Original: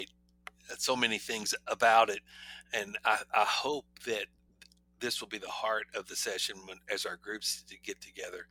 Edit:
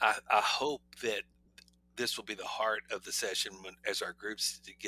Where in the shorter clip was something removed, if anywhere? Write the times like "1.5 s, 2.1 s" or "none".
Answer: none